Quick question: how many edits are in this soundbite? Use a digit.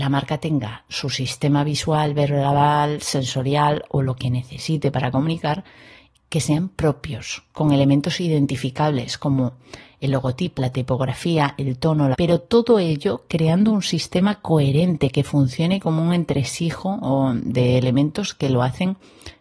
2